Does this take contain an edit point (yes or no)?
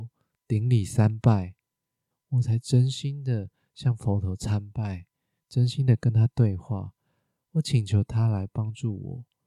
yes